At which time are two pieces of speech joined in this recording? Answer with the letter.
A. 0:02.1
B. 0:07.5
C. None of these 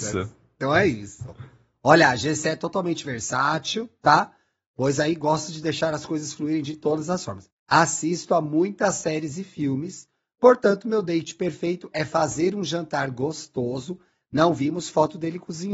B